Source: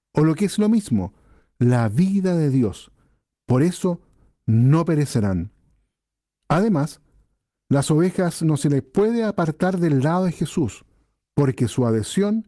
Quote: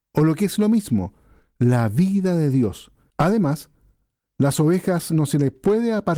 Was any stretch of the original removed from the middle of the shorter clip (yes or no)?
yes